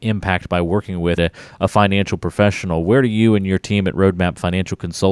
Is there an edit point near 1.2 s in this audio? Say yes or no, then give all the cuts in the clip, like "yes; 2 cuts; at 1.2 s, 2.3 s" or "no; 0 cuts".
yes; 1 cut; at 1.2 s